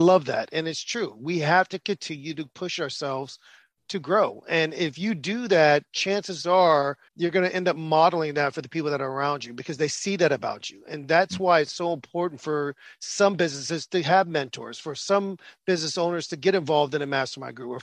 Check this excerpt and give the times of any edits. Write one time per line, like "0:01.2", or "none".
0:07.1